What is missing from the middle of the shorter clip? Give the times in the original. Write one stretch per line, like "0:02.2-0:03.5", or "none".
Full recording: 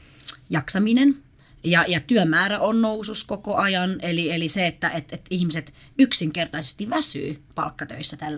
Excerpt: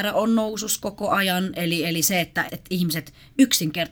0:04.9-0:05.1

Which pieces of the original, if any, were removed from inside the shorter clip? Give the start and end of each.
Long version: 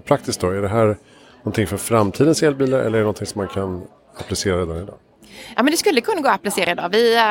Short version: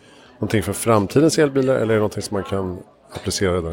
none

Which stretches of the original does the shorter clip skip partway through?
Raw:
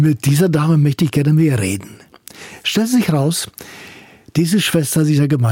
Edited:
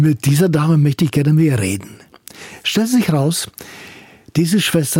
none

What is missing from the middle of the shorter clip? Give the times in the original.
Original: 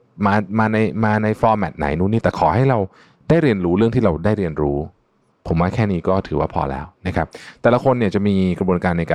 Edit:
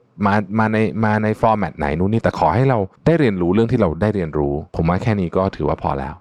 0:03.0-0:03.2
0:04.9-0:05.4

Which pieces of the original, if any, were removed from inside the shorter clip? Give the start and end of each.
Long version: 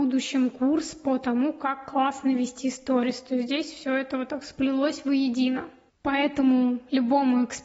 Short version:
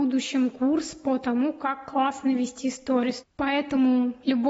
0:03.2-0:05.9

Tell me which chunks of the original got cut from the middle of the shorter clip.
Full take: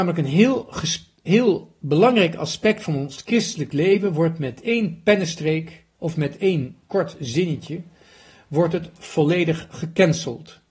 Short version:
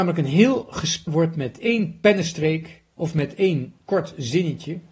0:01.1-0:04.1

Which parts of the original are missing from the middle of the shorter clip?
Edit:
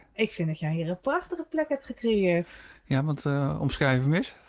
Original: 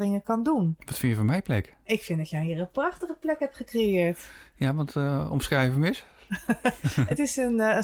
none

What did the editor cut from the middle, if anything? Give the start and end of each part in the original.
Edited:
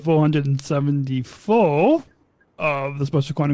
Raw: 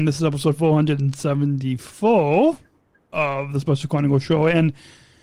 none

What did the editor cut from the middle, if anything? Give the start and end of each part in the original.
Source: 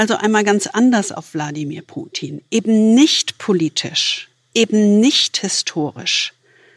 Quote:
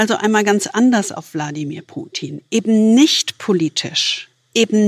none

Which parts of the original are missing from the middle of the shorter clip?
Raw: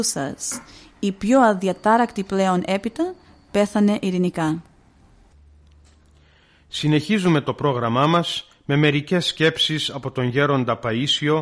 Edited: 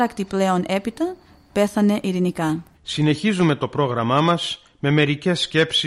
0:04.7-0:06.6

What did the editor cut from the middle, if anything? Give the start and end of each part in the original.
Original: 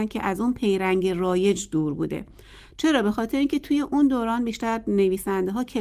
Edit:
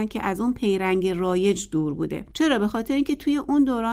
0:02.3-0:02.7

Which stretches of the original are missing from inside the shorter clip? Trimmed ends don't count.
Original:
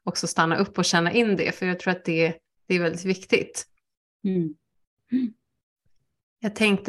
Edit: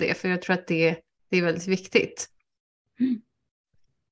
0:04.1-0:04.9

